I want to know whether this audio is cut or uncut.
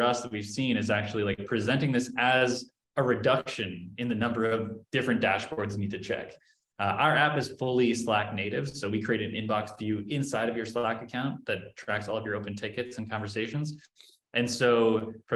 uncut